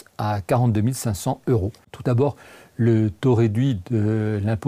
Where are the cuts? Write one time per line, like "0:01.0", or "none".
0:01.8

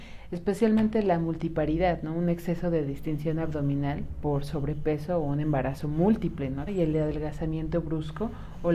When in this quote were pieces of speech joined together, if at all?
0:06.7

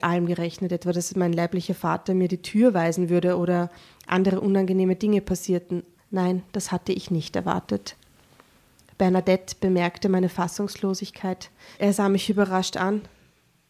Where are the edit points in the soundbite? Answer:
0:06.0
0:11.8

